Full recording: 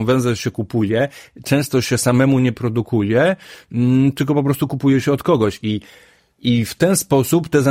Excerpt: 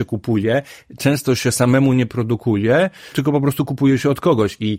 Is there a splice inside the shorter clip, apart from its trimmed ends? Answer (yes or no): yes